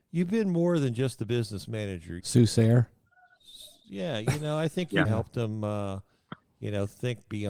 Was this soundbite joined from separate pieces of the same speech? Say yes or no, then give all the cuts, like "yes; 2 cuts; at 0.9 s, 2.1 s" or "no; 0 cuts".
yes; 2 cuts; at 2.2 s, 5.0 s